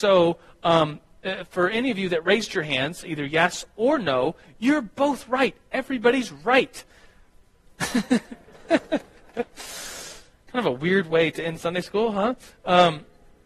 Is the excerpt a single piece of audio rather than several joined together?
yes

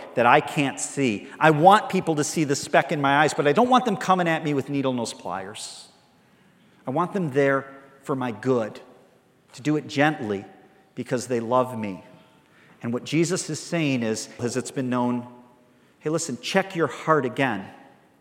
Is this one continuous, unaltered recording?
no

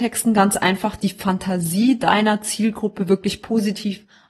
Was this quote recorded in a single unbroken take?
yes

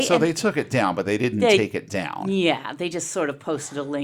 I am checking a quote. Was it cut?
no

